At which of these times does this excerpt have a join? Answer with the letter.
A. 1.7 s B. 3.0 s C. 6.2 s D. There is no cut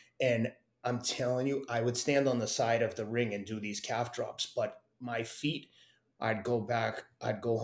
C